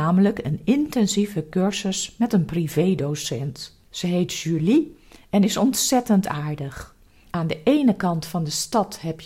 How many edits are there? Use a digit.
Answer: 2